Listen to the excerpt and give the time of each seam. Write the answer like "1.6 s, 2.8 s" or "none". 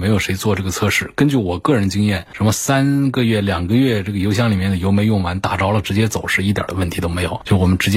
none